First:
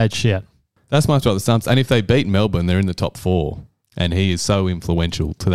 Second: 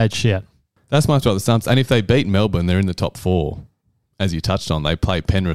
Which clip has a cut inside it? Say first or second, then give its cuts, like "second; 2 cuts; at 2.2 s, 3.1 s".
first; 1 cut; at 3.8 s